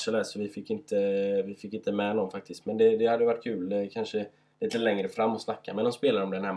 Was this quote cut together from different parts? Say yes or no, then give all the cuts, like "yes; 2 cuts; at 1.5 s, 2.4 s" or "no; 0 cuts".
no; 0 cuts